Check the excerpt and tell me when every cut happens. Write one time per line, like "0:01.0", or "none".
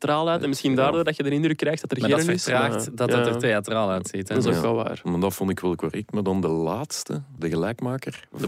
0:07.4